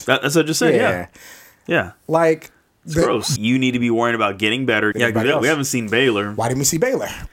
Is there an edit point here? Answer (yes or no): yes